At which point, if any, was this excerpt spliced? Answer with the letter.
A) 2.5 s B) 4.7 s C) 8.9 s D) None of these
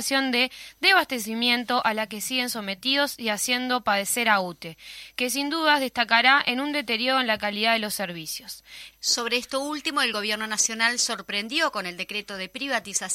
C